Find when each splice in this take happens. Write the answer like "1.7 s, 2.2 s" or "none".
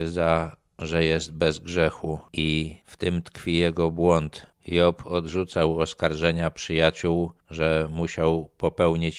4.5 s